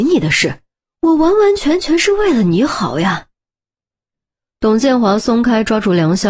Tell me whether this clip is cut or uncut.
uncut